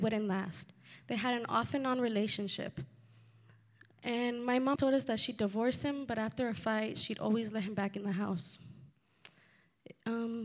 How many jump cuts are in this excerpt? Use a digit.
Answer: 1